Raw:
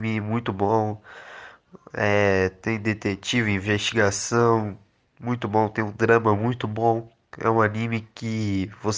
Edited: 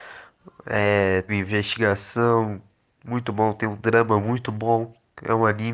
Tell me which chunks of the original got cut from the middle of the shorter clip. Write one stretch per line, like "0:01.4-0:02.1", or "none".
0:02.6-0:03.4